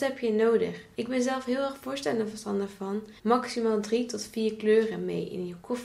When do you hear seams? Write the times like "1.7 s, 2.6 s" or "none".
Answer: 0.9 s, 3.2 s